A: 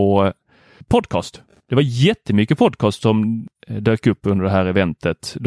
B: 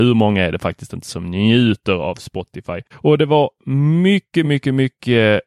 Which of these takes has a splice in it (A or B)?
B